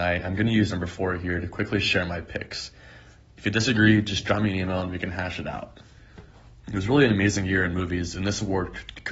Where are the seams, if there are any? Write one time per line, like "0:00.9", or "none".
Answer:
0:06.6